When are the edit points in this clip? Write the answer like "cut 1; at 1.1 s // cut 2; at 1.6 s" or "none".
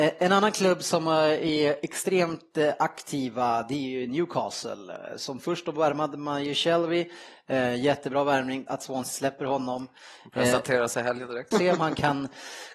cut 1; at 8.7 s // cut 2; at 11.5 s